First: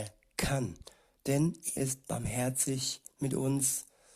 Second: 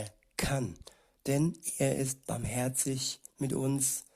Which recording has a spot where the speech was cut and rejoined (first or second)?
first